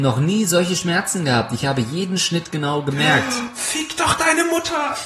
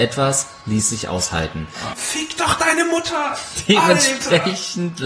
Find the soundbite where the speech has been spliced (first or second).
second